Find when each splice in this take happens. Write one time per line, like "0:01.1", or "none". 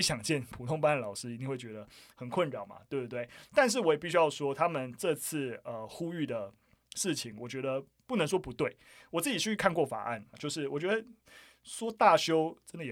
0:10.3